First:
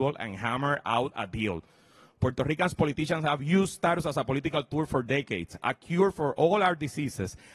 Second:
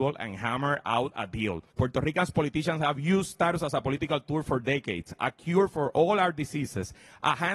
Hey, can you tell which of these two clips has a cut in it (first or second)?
second